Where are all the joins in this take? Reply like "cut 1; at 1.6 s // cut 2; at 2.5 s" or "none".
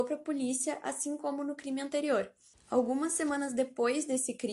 cut 1; at 2.5 s